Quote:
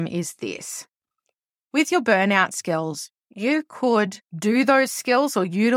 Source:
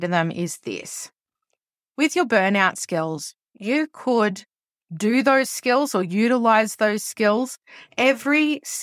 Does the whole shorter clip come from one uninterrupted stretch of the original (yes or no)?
no